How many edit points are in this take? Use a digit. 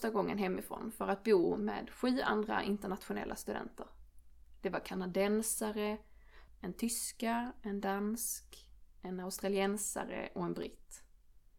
1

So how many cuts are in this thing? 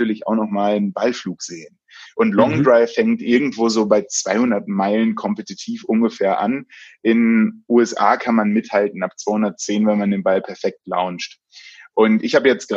1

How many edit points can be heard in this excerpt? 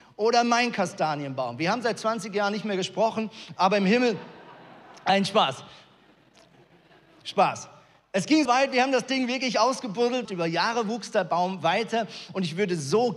2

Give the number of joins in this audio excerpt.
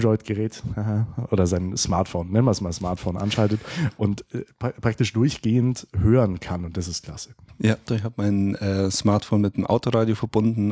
1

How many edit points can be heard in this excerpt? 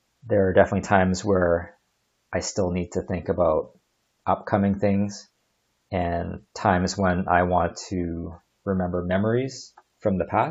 0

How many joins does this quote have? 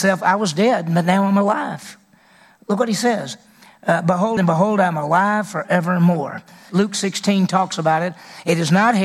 2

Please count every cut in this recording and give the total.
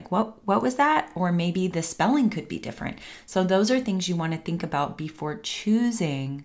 0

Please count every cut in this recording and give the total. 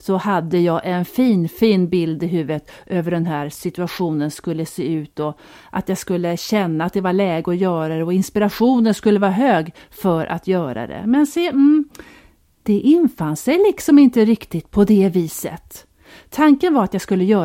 0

